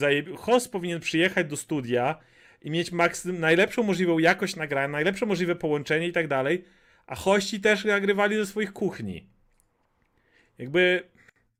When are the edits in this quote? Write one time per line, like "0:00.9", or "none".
none